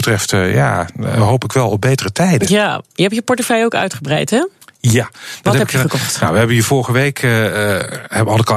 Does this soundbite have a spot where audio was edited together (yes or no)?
no